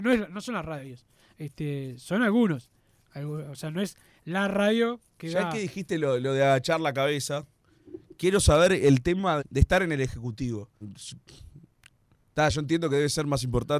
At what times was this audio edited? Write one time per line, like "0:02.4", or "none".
0:09.4
0:10.8